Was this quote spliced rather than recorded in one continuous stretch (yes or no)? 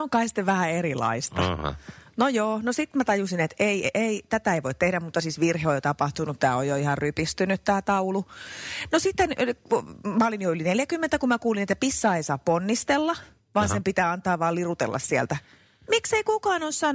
no